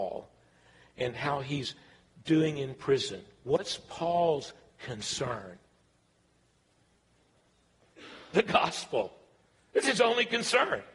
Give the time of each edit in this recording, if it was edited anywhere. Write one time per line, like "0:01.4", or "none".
none